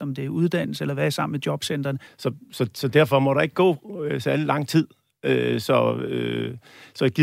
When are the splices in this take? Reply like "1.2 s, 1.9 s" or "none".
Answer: 2.1 s